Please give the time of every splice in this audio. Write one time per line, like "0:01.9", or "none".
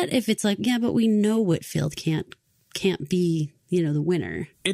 none